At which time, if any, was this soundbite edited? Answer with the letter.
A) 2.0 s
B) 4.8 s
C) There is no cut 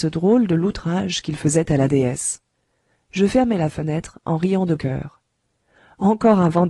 B